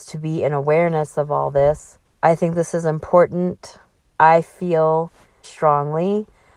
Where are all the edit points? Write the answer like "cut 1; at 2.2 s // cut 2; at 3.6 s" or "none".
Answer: cut 1; at 2.0 s // cut 2; at 5.4 s

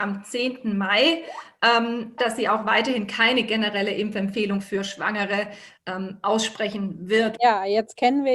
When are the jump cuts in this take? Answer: cut 1; at 2.2 s // cut 2; at 7.4 s

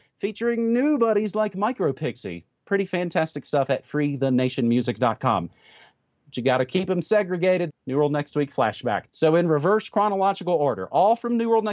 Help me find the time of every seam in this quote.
cut 1; at 7.7 s // cut 2; at 9.1 s

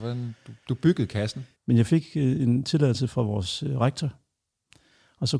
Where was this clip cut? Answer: cut 1; at 1.6 s

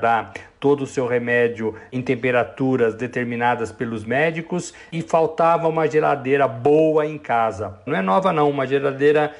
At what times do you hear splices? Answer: cut 1; at 7.9 s

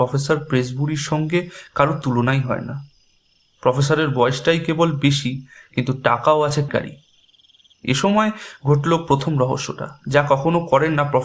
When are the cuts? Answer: cut 1; at 6.7 s

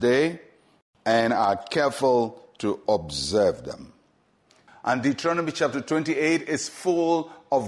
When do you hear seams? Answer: cut 1; at 4.7 s

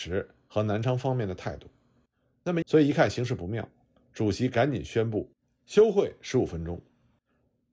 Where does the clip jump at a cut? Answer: cut 1; at 2.6 s

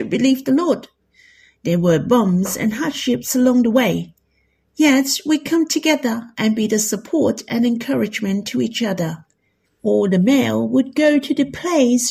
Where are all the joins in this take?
cut 1; at 9.6 s

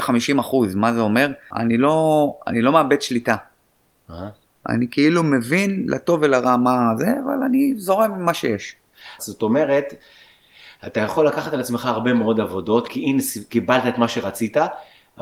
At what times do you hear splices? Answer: cut 1; at 1.5 s // cut 2; at 9.2 s // cut 3; at 12.9 s

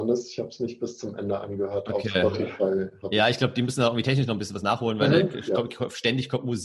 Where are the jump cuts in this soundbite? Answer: none

